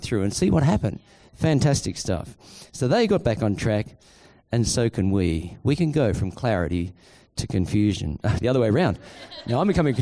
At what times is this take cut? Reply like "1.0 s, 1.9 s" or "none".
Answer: 8.4 s